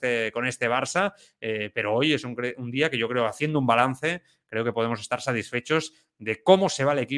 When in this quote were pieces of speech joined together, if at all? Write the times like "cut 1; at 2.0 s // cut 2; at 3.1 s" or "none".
none